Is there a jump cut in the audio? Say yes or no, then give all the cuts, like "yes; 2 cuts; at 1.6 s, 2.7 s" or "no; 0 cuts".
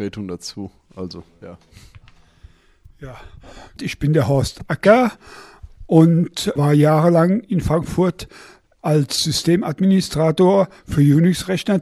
yes; 2 cuts; at 3.8 s, 6.6 s